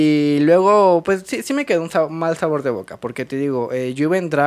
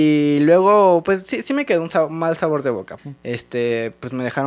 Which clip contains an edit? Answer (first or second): second